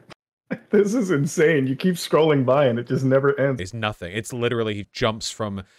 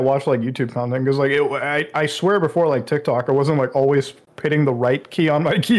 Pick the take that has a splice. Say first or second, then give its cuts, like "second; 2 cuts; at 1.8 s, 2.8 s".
first; 2 cuts; at 3.6 s, 4.8 s